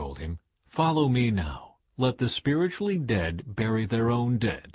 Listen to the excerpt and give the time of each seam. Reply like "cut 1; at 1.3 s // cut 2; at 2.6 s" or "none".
none